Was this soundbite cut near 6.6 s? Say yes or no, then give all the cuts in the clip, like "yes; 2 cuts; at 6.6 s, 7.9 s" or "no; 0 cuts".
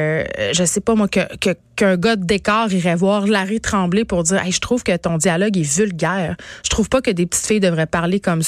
yes; 1 cut; at 6.6 s